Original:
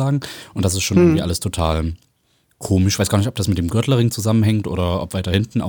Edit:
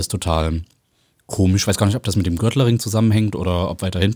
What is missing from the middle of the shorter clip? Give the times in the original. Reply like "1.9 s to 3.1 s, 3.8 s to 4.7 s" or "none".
none